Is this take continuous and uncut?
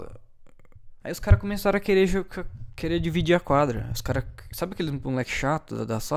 no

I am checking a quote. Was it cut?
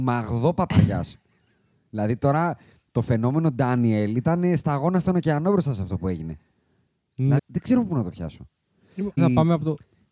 yes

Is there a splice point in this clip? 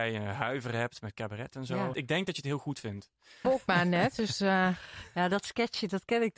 yes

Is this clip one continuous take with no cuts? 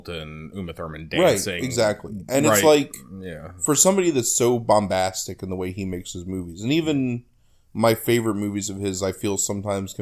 yes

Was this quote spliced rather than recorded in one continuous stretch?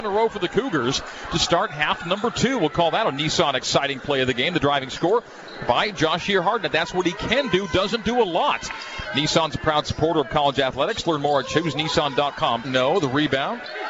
yes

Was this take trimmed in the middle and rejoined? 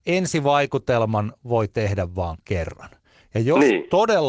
no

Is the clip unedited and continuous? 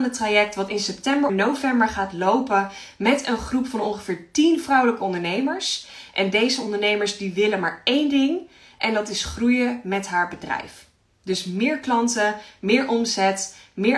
no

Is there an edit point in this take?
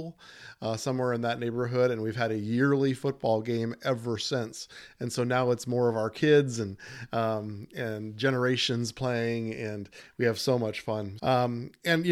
yes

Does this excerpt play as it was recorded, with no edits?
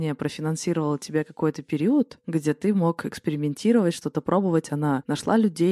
yes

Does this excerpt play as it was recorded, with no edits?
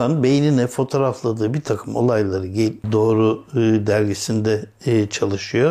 no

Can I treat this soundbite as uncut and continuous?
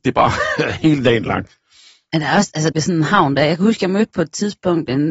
no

